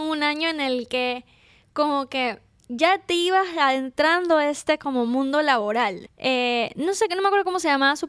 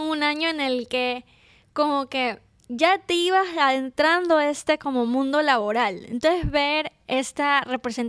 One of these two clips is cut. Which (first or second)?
first